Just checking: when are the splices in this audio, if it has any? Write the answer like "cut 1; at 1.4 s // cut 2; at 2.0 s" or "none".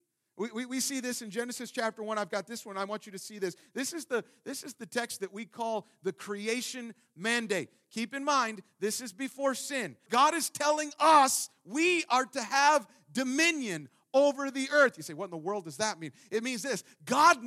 cut 1; at 10.1 s